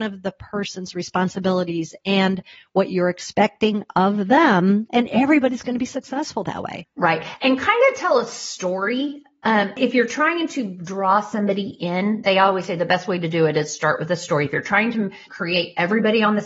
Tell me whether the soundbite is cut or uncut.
cut